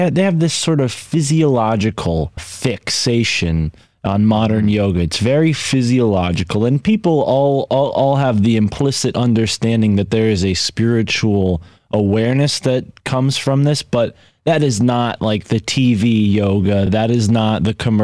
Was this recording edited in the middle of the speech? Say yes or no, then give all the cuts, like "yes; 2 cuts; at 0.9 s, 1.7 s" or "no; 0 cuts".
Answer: no; 0 cuts